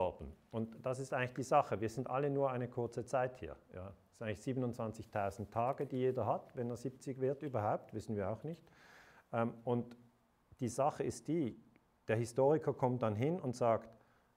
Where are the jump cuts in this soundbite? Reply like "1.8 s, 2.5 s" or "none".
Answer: none